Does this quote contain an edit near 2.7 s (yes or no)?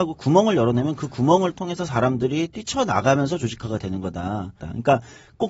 no